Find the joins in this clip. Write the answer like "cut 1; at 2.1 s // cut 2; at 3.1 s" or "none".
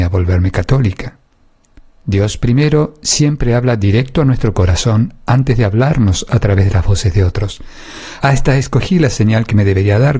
cut 1; at 1.9 s // cut 2; at 8.2 s